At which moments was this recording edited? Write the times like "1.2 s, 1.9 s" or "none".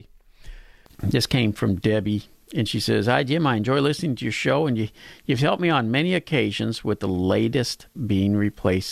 none